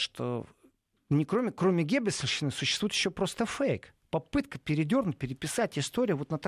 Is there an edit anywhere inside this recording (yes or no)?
no